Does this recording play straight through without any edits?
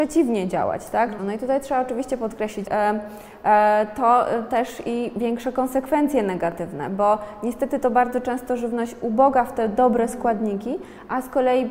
no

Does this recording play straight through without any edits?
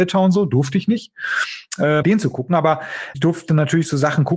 no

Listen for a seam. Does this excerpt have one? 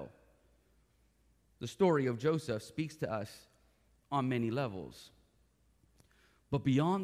no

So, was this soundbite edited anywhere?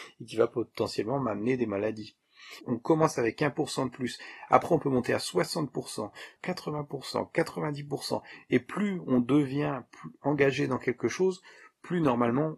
yes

